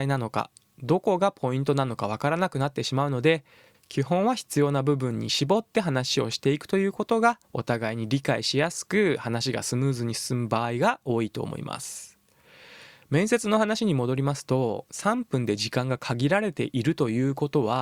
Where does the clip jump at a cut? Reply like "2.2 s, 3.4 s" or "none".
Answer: 7.4 s